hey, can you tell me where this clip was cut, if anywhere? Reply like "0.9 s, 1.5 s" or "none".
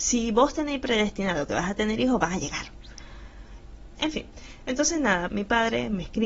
4.0 s, 5.3 s